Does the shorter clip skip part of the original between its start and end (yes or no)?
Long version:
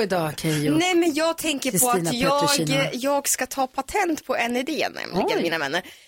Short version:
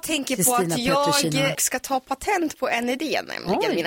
yes